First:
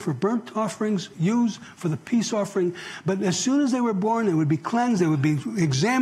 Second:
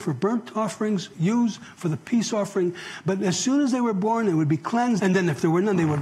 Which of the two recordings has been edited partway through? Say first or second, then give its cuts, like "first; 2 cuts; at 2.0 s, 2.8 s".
second; 1 cut; at 5.0 s